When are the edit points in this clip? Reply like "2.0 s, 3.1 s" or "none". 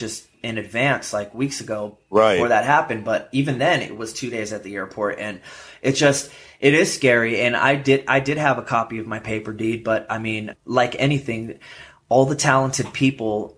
none